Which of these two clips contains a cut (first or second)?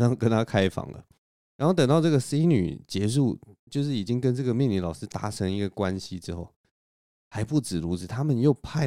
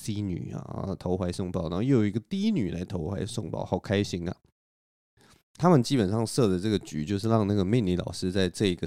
second